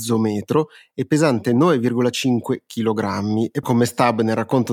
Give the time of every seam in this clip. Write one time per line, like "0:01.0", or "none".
0:03.6